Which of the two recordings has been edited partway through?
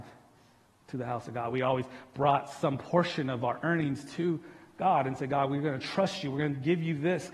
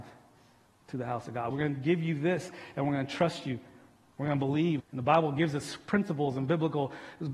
second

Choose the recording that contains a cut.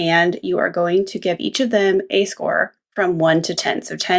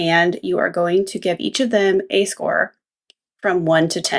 first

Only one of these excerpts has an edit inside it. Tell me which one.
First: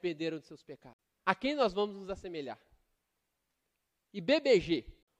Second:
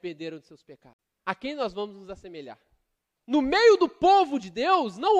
second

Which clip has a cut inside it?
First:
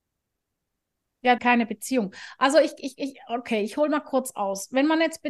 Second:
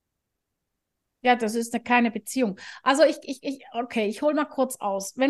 first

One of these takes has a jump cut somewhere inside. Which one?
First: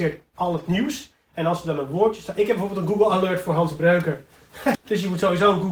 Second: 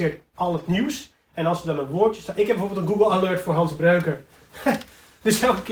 first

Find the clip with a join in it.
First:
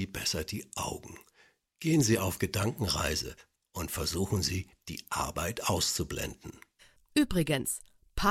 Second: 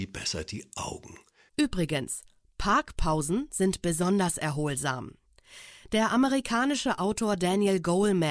second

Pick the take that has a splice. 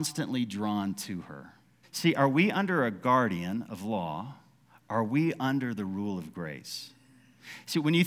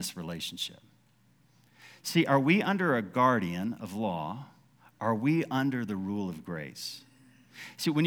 first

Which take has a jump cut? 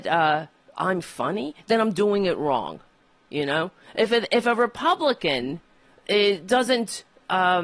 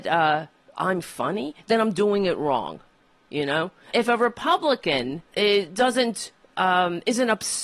second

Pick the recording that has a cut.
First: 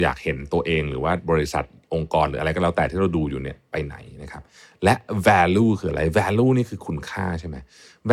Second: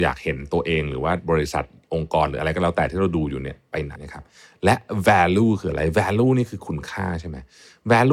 second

